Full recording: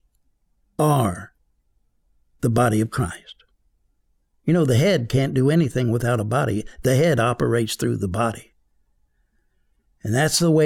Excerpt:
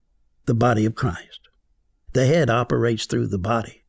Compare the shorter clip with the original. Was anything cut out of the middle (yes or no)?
yes